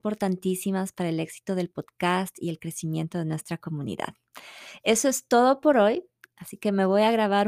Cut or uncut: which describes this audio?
uncut